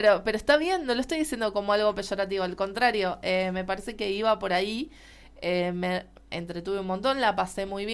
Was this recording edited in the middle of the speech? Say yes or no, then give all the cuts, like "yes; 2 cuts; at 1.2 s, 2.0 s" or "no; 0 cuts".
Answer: no; 0 cuts